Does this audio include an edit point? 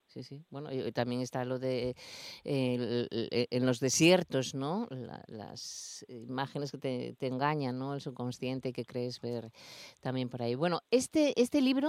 no; 0 cuts

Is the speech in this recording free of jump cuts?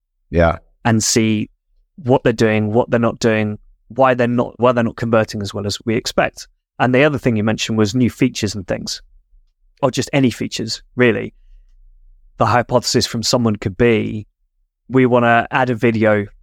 no; 1 cut; at 9.8 s

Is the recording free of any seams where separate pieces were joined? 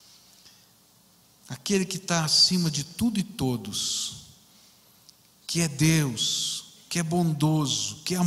yes; 0 cuts

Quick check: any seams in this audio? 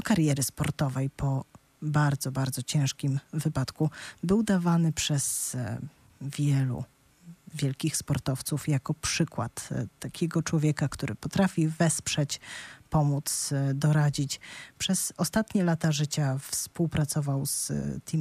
no; 0 cuts

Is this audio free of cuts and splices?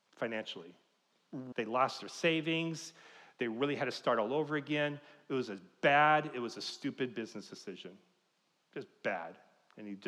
no; 1 cut; at 1.5 s

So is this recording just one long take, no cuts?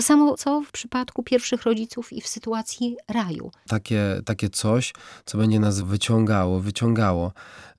no; 2 cuts; at 3.7 s, 5.8 s

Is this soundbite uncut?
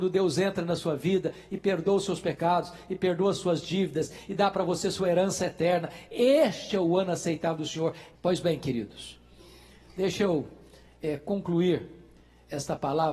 no; 1 cut; at 8.1 s

